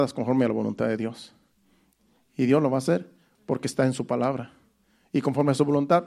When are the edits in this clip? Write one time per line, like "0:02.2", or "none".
none